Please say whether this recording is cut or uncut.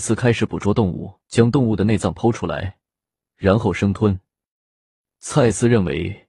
cut